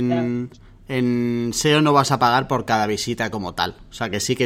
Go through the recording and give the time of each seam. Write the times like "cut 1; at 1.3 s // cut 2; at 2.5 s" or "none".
none